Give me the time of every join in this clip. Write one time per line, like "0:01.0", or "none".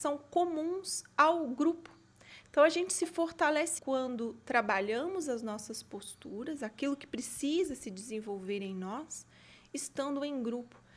0:03.8